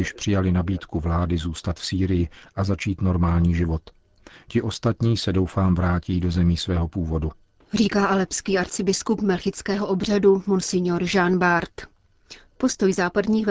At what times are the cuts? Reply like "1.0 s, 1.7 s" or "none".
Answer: 7.6 s